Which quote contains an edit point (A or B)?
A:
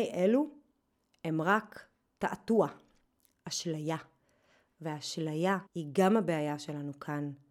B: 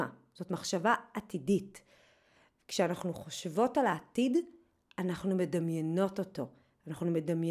A